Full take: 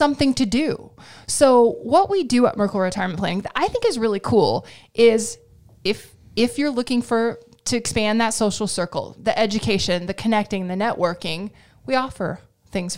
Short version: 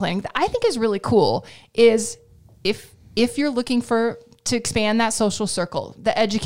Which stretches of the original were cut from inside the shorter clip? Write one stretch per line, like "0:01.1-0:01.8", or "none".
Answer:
none